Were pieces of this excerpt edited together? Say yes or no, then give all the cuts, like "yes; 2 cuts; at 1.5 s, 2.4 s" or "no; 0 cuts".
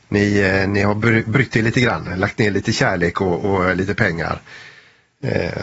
no; 0 cuts